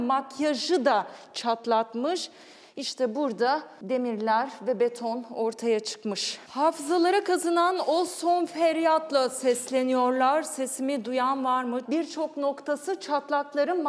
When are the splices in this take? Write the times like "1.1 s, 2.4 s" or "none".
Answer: 6.5 s, 11.8 s